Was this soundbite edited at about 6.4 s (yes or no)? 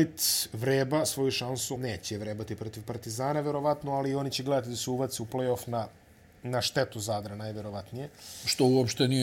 no